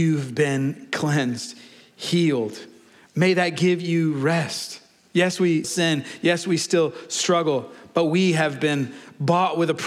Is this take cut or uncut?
cut